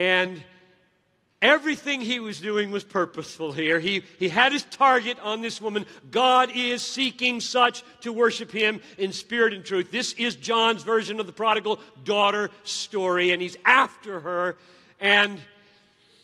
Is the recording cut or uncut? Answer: uncut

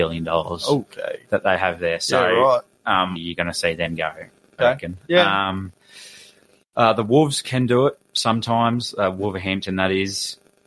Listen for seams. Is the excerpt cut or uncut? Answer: cut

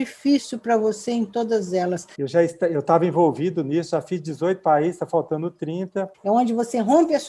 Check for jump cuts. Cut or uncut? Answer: cut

